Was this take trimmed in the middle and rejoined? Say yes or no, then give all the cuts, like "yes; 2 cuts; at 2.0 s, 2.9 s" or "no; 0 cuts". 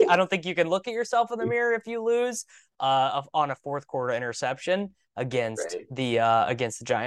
no; 0 cuts